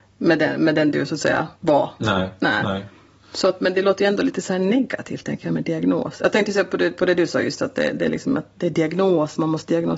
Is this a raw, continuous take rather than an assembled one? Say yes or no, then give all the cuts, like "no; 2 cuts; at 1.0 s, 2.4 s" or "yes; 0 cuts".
no; 1 cut; at 1.6 s